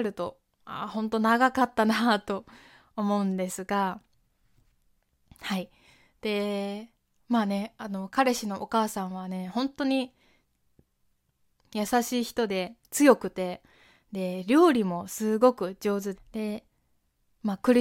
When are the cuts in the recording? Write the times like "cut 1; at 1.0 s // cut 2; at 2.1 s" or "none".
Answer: cut 1; at 16.1 s

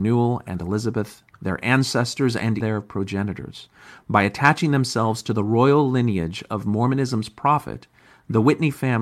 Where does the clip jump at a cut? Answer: cut 1; at 2.6 s

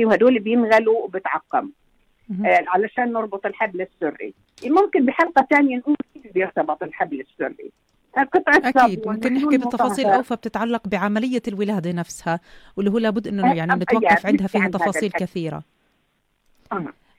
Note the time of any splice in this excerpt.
none

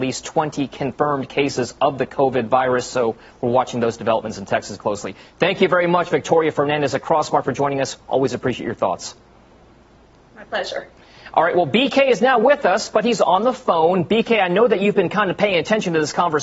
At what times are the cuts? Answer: cut 1; at 4.8 s

